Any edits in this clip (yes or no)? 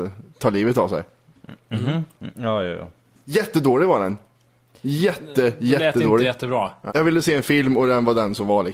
yes